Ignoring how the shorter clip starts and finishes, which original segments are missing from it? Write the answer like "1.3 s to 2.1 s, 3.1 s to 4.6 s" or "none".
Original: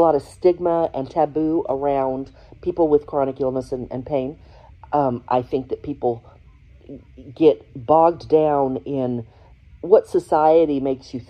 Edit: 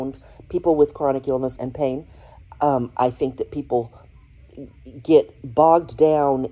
3.7 s to 3.9 s